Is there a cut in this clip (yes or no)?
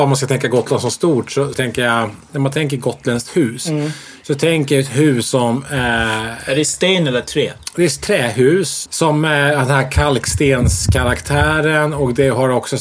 yes